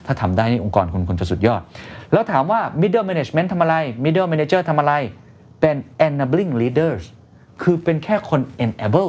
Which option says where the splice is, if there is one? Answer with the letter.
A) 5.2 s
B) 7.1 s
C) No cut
C